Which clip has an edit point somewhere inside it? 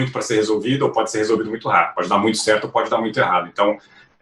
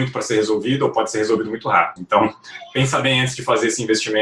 second; 1 cut; at 2.0 s

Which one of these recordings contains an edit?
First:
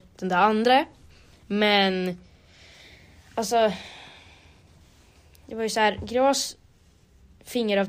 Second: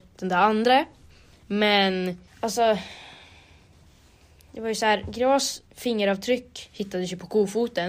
second; 2 cuts; at 2.3 s, 5.7 s

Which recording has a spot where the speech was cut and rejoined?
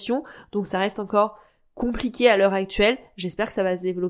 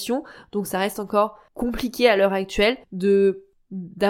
second; 2 cuts; at 1.5 s, 2.8 s

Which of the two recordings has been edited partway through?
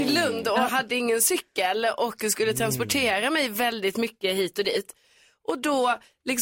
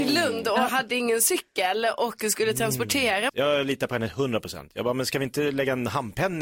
second; 1 cut; at 3.3 s

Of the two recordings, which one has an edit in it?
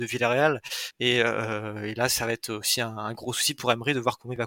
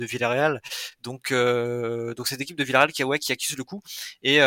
first; 1 cut; at 0.9 s

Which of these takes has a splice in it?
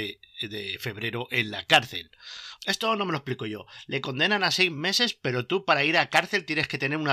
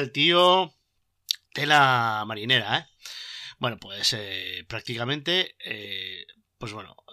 first; 1 cut; at 2.6 s

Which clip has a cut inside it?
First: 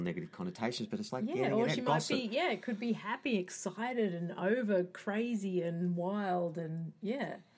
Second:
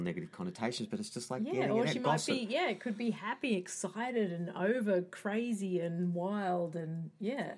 first; 1 cut; at 1.1 s

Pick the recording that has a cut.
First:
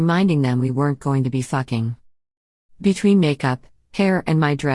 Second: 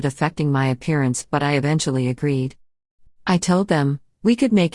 second; 1 cut; at 3.1 s

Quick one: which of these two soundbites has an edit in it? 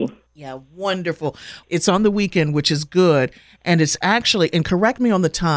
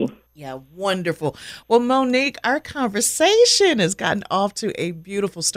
first; 1 cut; at 1.6 s

